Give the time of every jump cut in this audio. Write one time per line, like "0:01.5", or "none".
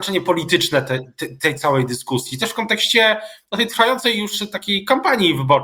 none